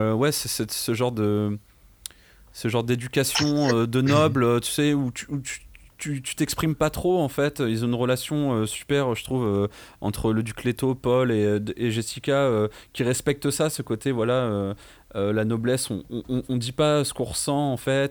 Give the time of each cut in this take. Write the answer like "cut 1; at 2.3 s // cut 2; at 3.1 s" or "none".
none